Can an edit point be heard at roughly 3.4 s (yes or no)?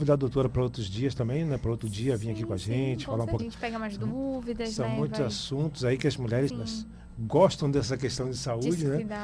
yes